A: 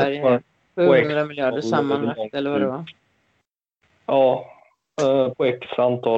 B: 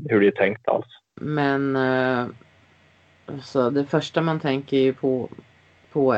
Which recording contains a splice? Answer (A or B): B